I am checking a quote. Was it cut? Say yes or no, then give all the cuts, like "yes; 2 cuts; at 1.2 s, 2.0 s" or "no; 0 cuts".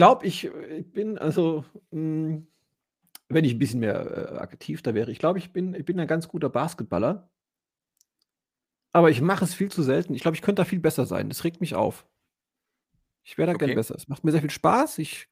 no; 0 cuts